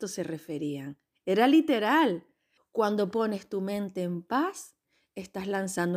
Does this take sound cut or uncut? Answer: cut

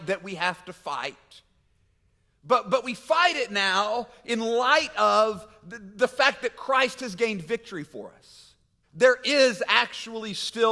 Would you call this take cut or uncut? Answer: cut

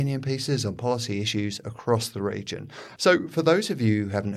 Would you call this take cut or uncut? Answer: cut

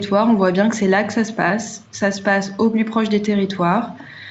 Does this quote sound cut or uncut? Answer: uncut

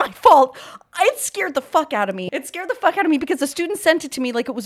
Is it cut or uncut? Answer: cut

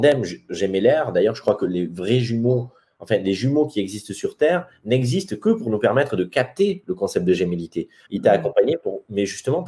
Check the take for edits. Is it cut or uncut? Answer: cut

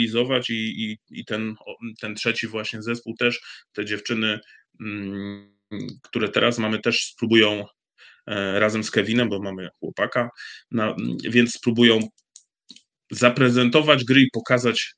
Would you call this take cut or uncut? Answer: uncut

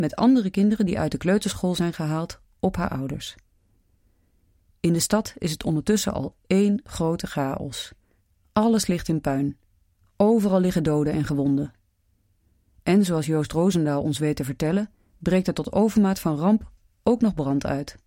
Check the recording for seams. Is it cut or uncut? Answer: uncut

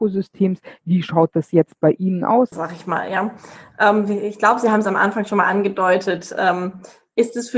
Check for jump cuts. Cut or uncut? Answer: cut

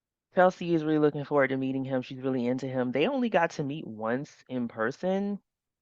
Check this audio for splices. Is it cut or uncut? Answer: uncut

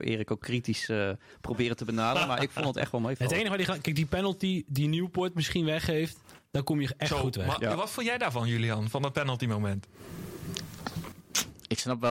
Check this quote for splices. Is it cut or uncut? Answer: uncut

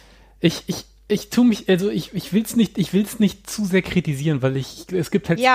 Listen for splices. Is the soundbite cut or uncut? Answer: uncut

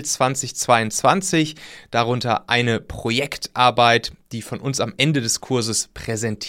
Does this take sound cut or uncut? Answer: uncut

